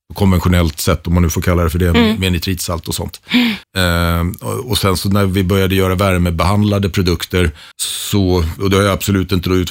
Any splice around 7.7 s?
yes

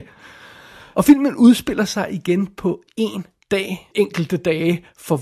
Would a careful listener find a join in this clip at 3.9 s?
yes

